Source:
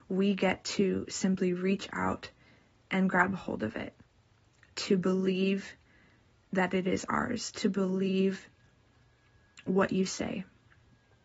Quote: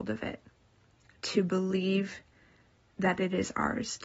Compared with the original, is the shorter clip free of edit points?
yes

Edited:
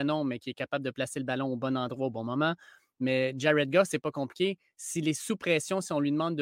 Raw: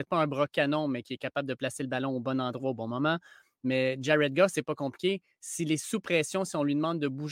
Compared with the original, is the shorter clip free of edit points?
yes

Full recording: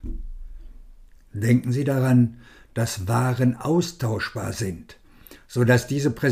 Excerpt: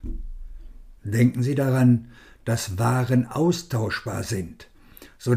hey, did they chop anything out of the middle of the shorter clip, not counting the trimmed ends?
yes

